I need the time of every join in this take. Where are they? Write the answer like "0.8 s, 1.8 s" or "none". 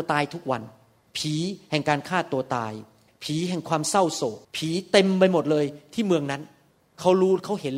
4.4 s